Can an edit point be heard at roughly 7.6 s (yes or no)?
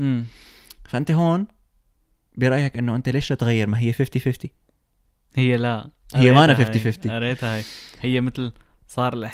no